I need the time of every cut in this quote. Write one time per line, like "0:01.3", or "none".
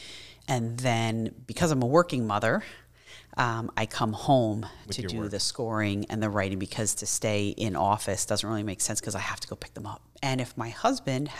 0:10.1